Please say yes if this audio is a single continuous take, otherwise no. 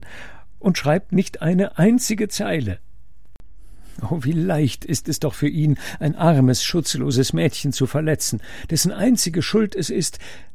yes